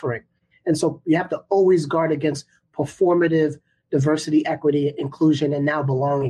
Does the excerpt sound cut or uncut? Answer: uncut